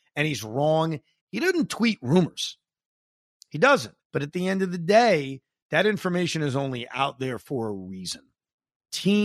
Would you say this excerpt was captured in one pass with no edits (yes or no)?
no